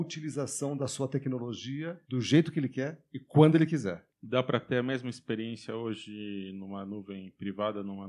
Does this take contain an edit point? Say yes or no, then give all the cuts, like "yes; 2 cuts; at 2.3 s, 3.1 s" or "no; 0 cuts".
yes; 1 cut; at 2.0 s